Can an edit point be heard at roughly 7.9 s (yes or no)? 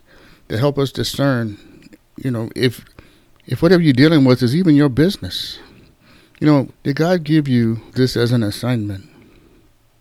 yes